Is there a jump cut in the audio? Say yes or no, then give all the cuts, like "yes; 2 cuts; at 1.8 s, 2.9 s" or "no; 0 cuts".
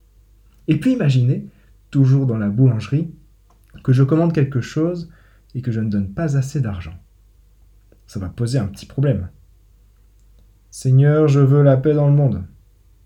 no; 0 cuts